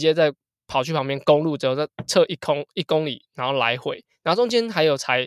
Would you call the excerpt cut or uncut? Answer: uncut